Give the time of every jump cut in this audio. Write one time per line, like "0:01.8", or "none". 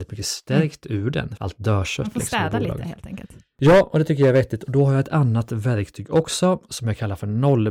0:01.4